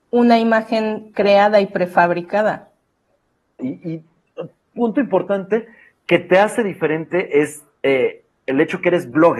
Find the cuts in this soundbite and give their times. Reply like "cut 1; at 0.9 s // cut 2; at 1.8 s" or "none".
cut 1; at 3.6 s